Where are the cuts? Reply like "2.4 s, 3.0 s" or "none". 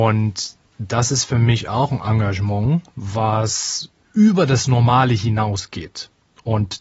none